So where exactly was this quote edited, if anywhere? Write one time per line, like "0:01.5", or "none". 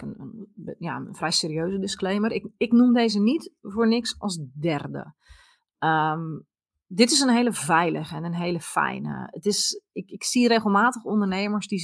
none